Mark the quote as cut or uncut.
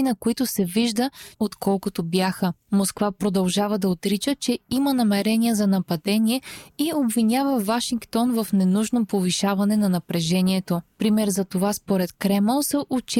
cut